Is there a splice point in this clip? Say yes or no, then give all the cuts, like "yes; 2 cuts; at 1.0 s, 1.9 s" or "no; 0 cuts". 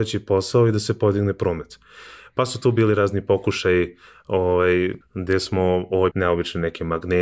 yes; 2 cuts; at 5.0 s, 6.1 s